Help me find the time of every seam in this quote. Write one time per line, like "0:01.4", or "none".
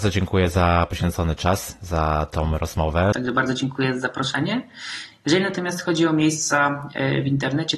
0:03.1